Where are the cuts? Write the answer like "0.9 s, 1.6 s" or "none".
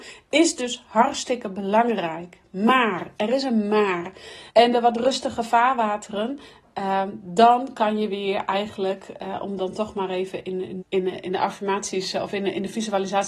4.5 s, 10.8 s